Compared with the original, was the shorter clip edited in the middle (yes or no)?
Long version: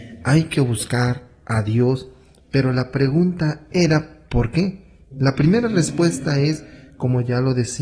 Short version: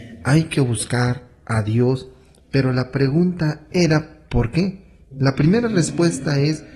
no